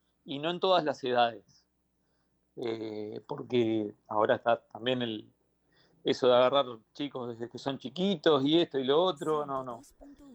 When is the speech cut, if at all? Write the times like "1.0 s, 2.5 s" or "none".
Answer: none